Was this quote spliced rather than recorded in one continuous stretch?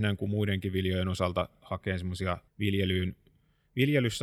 yes; 1 cut; at 2.5 s

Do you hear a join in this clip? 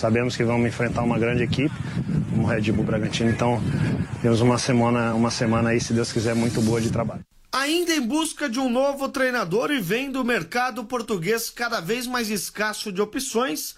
no; 0 cuts

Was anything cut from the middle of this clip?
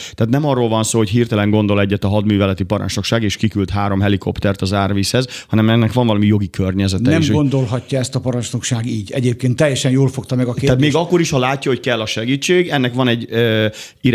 no; 0 cuts

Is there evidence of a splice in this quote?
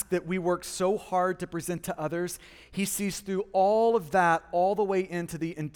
no; 0 cuts

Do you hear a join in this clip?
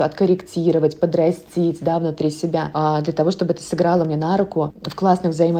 no; 0 cuts

